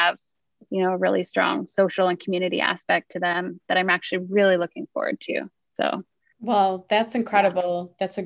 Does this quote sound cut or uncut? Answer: uncut